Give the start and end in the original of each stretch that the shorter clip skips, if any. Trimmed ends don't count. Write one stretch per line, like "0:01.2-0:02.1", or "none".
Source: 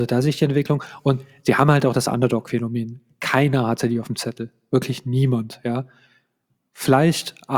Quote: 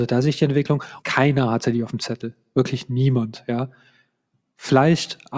0:01.0-0:03.2